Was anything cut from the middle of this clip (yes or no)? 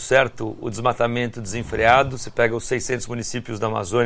no